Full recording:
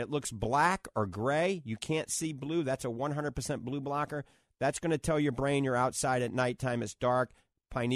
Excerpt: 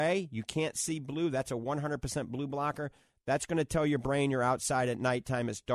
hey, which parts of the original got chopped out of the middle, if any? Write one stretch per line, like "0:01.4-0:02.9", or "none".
none